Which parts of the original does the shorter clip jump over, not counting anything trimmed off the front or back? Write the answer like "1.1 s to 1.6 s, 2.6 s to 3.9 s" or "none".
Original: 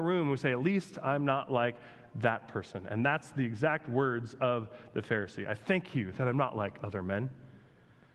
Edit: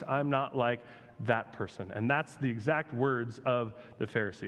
none